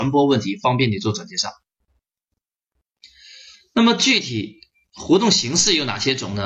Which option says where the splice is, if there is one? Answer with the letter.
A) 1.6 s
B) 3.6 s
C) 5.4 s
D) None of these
D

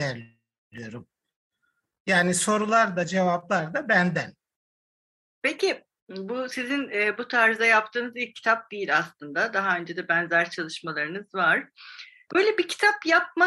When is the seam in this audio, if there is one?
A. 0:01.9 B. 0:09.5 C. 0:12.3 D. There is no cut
C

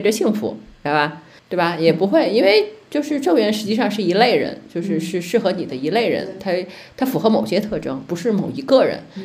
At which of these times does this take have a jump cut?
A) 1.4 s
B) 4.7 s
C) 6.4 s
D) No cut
A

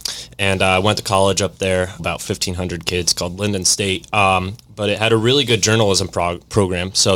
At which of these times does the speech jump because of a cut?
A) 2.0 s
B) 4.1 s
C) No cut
A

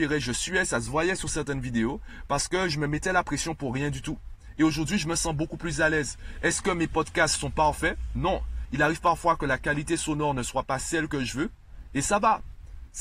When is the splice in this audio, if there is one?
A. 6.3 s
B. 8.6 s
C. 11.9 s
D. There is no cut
B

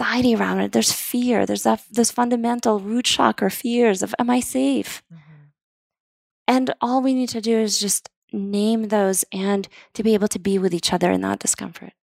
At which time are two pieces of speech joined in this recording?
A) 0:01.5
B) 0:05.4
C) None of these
C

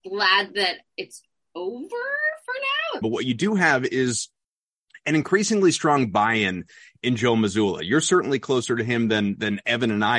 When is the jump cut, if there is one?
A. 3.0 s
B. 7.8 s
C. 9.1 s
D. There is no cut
A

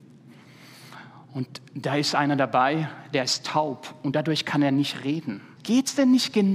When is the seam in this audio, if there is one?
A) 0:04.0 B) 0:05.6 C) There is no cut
B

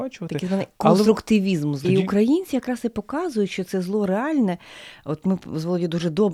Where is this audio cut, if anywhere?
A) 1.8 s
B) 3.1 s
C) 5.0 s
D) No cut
A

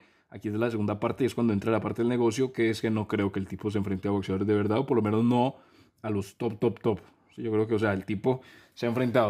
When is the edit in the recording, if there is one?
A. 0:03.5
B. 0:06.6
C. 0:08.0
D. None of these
B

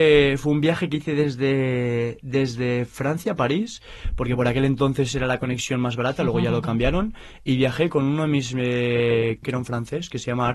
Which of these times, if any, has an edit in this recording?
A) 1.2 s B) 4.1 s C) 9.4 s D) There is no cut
C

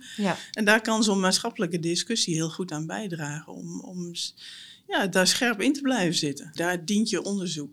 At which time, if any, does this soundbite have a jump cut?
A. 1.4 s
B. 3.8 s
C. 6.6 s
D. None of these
C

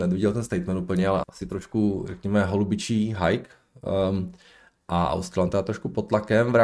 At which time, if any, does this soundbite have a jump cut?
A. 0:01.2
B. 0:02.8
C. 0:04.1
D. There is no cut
A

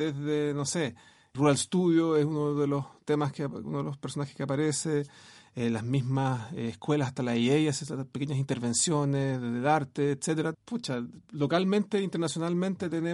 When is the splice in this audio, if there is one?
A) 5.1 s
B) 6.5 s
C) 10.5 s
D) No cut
C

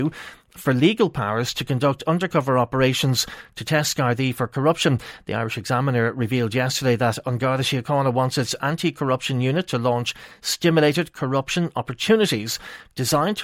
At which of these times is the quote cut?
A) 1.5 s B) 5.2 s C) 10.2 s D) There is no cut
D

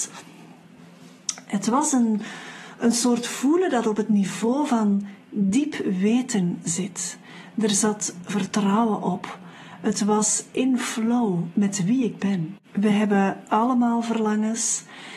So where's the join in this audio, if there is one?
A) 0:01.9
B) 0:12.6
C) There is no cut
B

